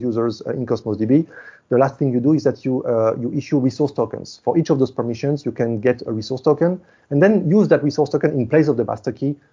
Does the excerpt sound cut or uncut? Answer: uncut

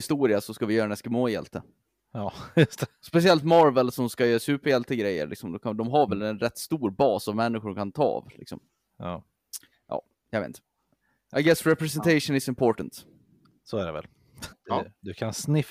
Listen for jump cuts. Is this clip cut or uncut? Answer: cut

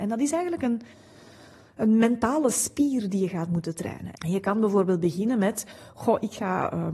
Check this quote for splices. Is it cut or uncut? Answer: cut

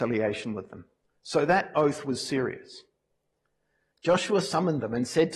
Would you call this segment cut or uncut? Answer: cut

